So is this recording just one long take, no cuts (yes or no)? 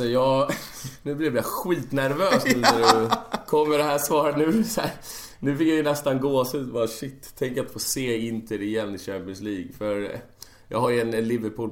yes